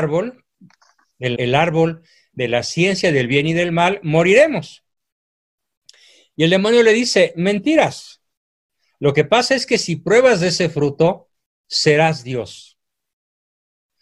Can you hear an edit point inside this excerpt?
yes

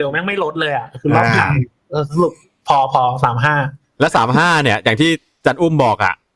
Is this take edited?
no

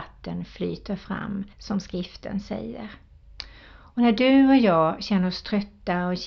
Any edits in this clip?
yes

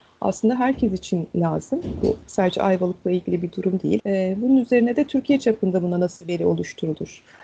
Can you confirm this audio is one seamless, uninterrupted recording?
no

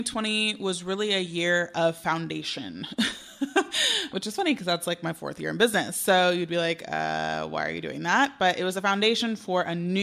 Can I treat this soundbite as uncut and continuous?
yes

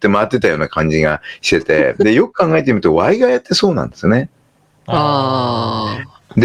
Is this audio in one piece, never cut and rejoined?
yes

